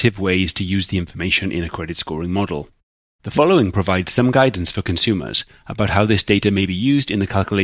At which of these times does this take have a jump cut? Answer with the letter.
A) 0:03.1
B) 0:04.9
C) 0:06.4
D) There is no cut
D